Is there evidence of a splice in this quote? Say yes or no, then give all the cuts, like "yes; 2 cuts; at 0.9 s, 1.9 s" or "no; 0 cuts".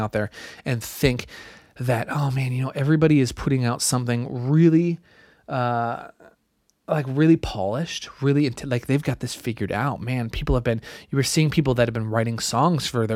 no; 0 cuts